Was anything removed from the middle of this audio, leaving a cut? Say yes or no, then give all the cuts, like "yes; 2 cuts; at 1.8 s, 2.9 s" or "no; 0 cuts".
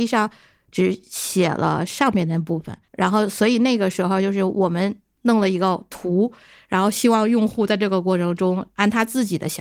yes; 1 cut; at 2.9 s